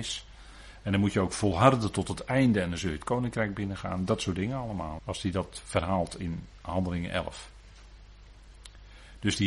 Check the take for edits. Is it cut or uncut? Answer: cut